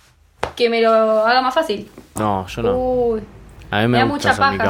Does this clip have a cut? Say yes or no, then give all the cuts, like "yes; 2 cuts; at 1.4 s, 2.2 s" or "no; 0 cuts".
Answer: yes; 1 cut; at 2.2 s